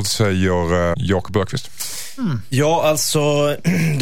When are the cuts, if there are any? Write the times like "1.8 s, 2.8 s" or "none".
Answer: 0.9 s